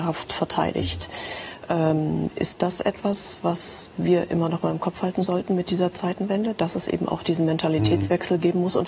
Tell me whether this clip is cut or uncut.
uncut